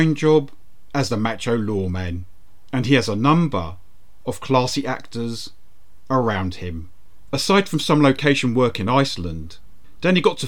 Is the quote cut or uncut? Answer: cut